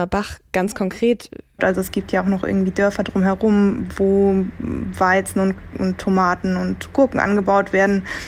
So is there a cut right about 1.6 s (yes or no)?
yes